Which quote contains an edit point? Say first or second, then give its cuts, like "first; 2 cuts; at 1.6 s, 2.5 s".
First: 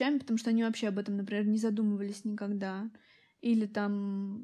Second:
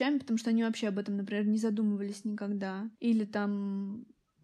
second; 1 cut; at 2.9 s